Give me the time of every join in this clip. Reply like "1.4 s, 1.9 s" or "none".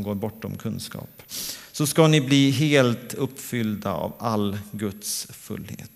none